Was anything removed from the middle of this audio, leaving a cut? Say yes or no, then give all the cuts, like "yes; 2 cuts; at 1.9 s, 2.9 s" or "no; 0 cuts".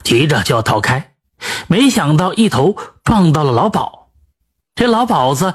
no; 0 cuts